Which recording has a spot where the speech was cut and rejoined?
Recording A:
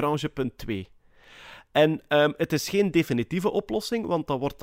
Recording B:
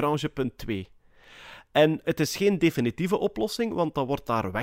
B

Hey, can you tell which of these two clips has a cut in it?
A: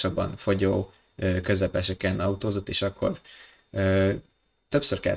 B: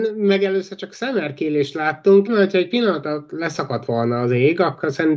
B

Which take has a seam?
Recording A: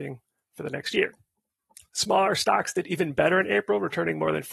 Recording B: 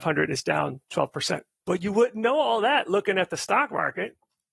B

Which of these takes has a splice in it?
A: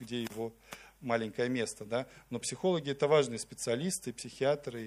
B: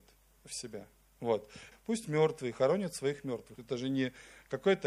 B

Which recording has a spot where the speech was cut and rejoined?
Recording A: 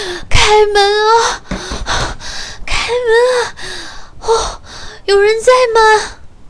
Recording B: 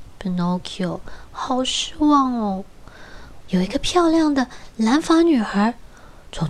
B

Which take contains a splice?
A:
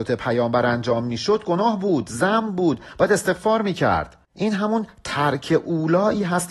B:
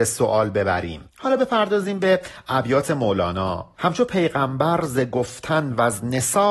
B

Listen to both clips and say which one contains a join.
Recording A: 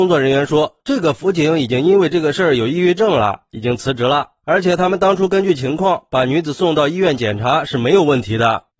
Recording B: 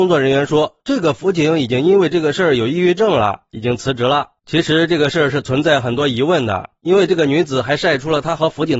B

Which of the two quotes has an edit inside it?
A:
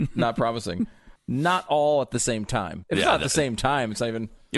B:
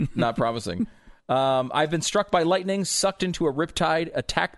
A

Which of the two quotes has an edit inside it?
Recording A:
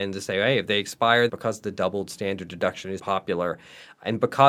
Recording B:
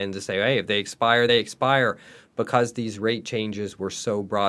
A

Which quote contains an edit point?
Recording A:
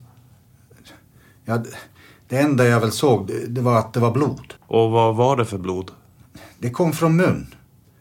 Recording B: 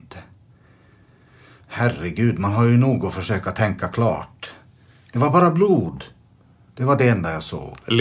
A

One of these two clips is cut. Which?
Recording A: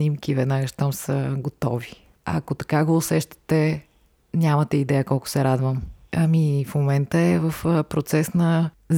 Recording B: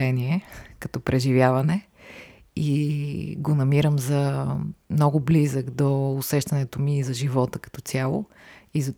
A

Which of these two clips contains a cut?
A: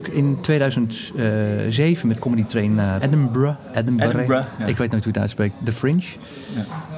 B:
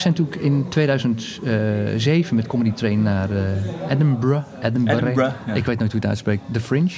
A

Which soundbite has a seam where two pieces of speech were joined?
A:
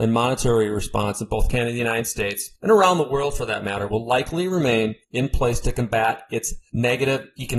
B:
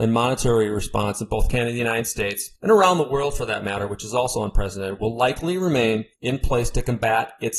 A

